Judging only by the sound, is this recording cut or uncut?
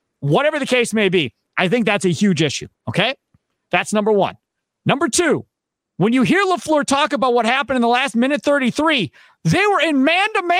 uncut